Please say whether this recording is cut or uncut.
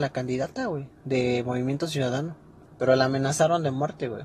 cut